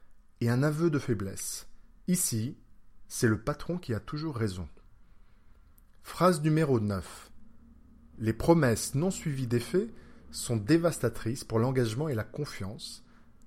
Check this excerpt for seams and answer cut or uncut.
cut